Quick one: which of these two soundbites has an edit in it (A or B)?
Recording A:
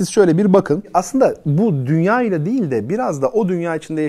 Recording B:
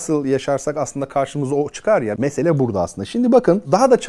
B